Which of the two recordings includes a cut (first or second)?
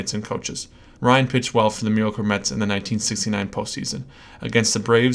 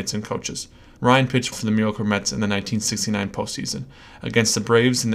second